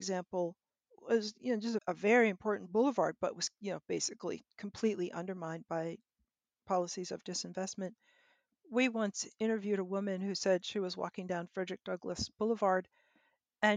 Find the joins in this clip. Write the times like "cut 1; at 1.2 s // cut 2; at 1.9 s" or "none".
cut 1; at 1.8 s